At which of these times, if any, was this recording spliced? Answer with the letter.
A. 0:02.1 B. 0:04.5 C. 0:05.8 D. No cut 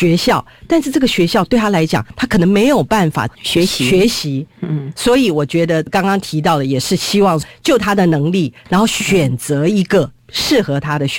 D